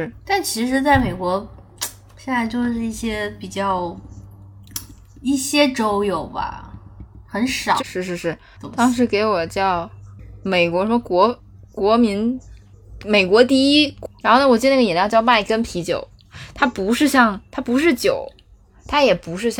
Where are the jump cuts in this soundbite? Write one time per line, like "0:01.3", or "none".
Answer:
0:07.8